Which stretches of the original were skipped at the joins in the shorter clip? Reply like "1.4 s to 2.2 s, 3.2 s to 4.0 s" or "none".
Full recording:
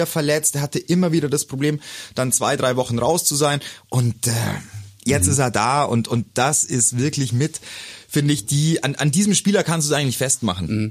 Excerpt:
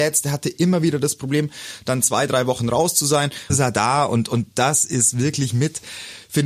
3.8 s to 5.3 s